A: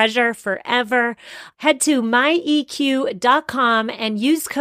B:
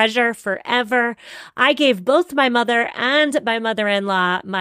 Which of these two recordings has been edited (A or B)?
A